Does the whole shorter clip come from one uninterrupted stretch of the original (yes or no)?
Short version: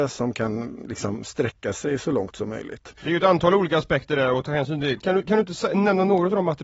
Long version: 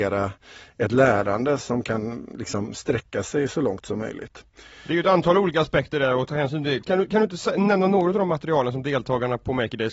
no